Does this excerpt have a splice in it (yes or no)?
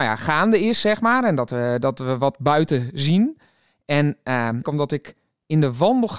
yes